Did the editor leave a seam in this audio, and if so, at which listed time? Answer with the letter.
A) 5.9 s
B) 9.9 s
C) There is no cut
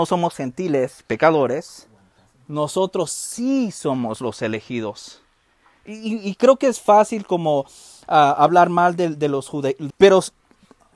B